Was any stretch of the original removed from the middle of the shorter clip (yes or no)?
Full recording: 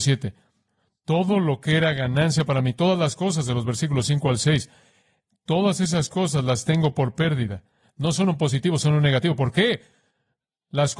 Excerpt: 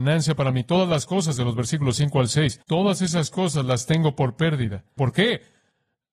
yes